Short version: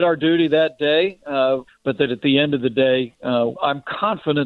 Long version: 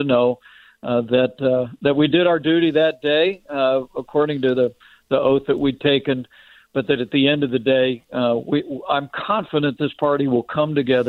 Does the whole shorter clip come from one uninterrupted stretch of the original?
no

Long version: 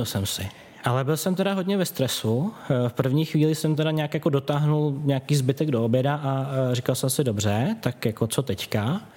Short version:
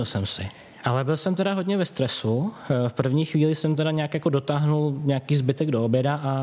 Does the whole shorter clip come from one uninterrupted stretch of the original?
yes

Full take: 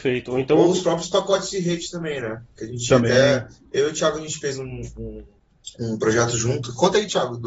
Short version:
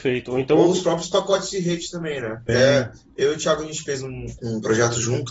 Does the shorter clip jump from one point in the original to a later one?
yes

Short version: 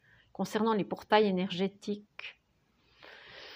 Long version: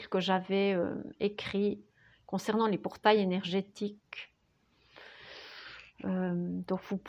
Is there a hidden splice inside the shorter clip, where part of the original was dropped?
no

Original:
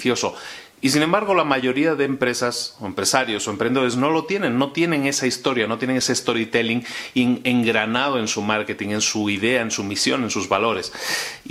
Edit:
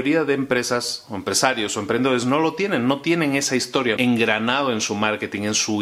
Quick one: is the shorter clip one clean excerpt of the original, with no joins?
no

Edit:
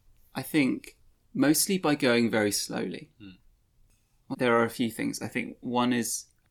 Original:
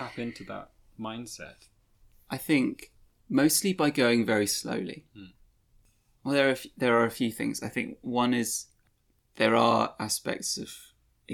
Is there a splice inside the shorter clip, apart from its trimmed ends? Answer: yes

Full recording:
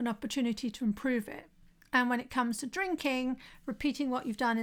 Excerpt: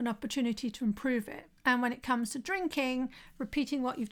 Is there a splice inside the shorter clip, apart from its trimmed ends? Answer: yes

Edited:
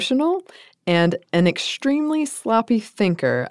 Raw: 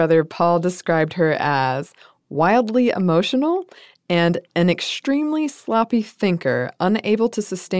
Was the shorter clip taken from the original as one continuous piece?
yes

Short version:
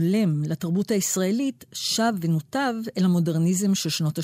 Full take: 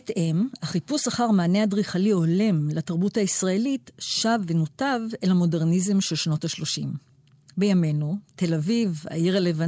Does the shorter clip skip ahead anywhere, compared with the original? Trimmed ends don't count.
no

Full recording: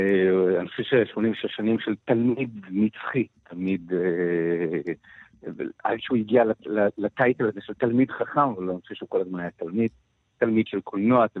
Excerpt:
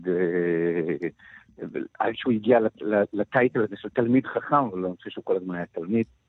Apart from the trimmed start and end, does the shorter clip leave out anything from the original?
no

